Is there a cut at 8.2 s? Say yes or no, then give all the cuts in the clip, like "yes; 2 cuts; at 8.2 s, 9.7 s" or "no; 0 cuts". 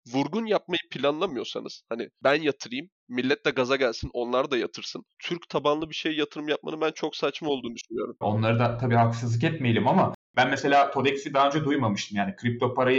yes; 2 cuts; at 5.1 s, 8.2 s